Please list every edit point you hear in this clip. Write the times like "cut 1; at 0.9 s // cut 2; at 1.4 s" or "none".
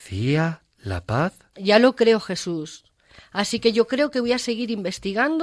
cut 1; at 1.5 s

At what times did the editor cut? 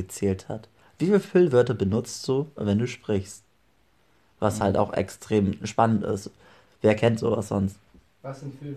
none

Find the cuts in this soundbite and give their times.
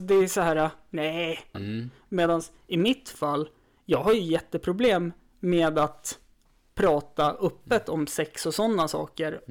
cut 1; at 1.5 s

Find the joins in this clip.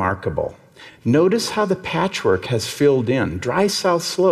none

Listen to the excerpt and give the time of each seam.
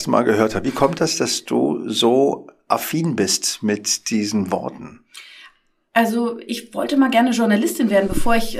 none

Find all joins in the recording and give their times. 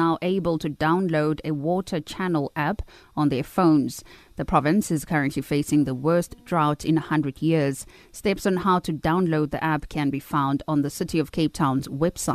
cut 1; at 4.2 s

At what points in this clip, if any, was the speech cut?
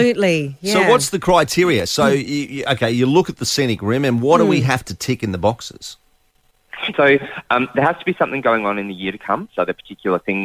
cut 1; at 6.9 s // cut 2; at 9.5 s

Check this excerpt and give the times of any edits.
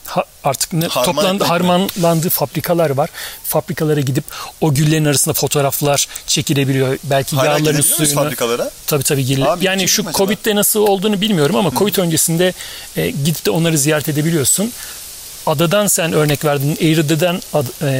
cut 1; at 3.4 s

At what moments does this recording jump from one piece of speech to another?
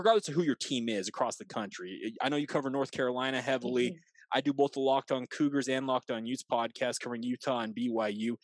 none

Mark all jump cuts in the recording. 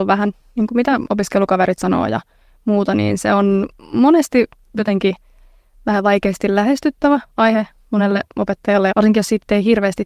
cut 1; at 8.9 s

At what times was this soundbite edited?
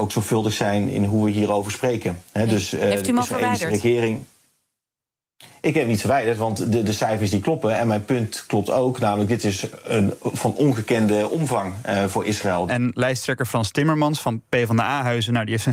cut 1; at 12.7 s

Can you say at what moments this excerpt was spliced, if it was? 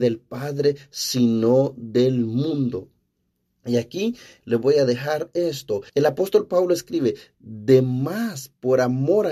cut 1; at 4.4 s // cut 2; at 5.9 s

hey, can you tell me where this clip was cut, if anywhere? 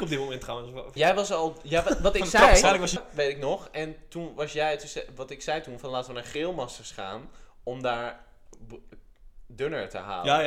cut 1; at 1.0 s // cut 2; at 3.0 s

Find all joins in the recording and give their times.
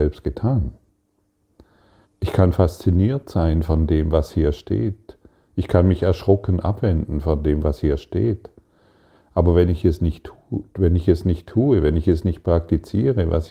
cut 1; at 2.0 s

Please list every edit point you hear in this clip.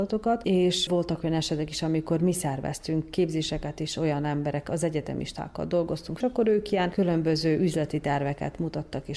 cut 1; at 6.2 s

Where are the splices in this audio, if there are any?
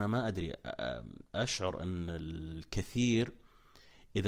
cut 1; at 1.3 s

